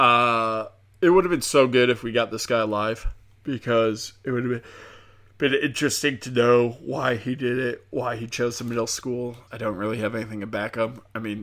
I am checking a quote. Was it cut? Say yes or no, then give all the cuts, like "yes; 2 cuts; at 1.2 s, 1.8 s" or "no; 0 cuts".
yes; 1 cut; at 9.5 s